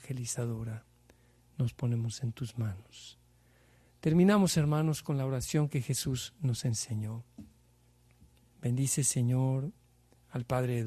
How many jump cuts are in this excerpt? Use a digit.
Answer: 1